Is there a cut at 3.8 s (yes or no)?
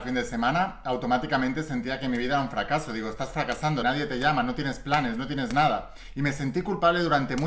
yes